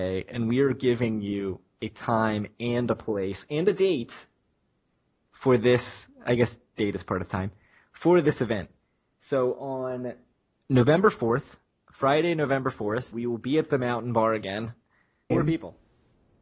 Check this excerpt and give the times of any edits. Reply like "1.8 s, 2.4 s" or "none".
13.1 s, 15.3 s